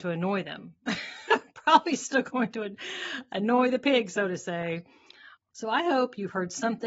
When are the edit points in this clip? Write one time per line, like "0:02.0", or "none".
0:05.4

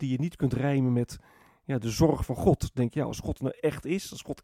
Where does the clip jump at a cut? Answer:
none

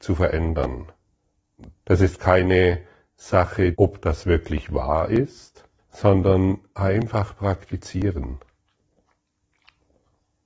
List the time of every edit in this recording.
0:01.8
0:03.7
0:05.8

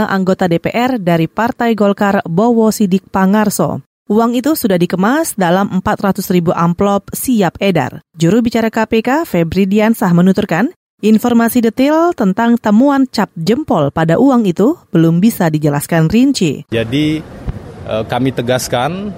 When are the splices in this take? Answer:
0:16.7

